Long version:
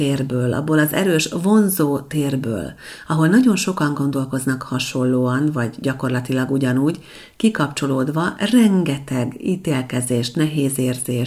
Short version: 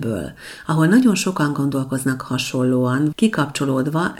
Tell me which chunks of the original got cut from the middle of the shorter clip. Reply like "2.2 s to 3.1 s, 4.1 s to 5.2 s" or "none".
5.5 s to 7.3 s